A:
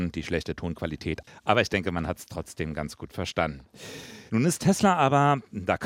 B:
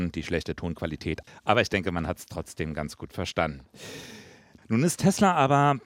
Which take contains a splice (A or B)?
A